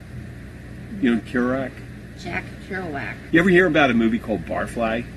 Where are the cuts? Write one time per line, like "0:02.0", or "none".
0:01.2
0:03.3